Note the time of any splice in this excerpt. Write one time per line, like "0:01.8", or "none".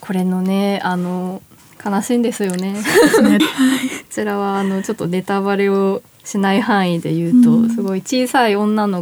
0:03.4